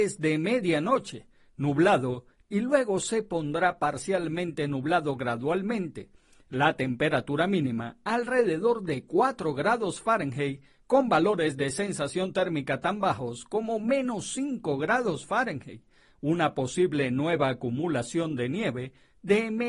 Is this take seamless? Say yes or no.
yes